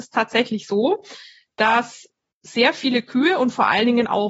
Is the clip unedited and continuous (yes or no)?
yes